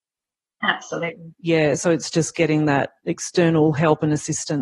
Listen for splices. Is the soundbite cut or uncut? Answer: uncut